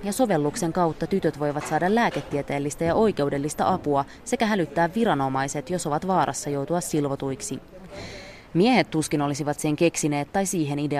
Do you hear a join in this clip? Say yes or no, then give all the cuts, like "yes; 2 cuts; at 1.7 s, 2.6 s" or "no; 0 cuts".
no; 0 cuts